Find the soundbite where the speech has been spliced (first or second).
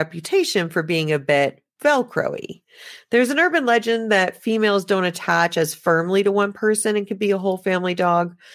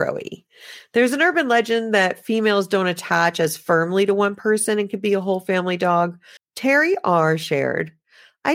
second